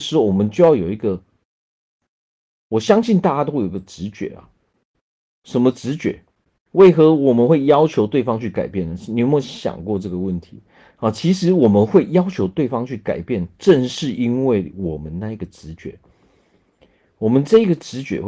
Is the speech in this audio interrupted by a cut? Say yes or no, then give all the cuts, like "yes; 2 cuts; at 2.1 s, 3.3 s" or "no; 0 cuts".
yes; 1 cut; at 6.7 s